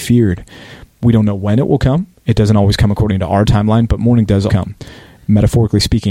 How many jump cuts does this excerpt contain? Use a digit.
2